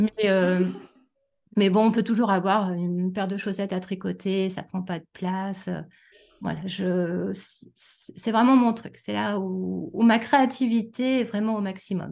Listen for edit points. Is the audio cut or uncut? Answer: uncut